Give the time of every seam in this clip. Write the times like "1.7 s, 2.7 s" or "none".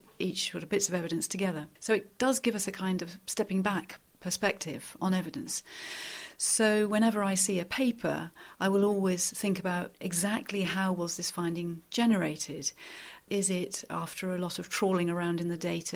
1.8 s